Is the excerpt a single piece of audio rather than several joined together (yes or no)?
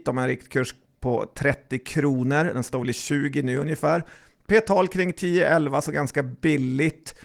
yes